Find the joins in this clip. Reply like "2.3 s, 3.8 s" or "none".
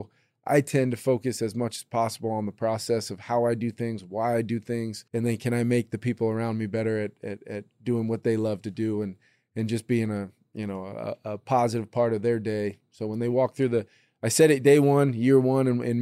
5.1 s